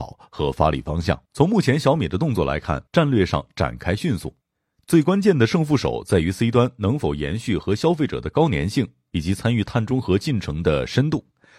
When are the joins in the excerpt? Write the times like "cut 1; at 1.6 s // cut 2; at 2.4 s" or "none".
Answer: cut 1; at 1.3 s // cut 2; at 2.9 s